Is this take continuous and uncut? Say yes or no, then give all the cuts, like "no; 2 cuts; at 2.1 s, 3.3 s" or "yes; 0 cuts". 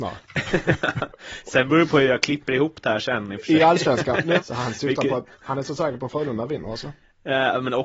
no; 1 cut; at 4.4 s